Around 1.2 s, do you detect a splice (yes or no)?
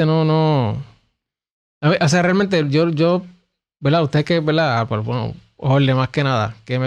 no